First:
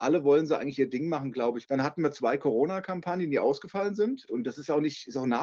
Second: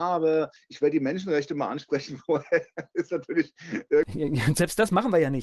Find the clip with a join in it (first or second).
first